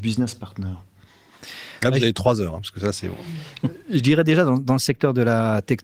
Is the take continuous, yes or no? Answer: yes